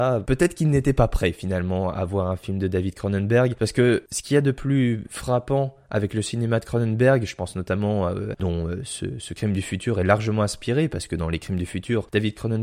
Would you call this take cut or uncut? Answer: cut